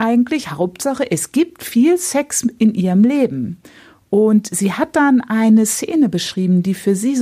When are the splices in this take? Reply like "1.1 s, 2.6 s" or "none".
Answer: none